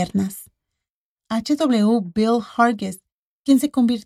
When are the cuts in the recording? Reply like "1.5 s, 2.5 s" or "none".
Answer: none